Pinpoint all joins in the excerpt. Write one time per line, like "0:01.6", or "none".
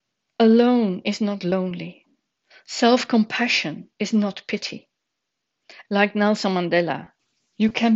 0:03.9
0:05.8